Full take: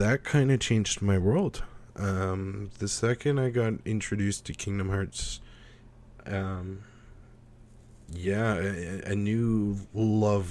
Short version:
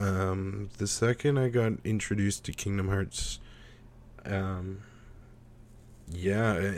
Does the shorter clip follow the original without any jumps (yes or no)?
yes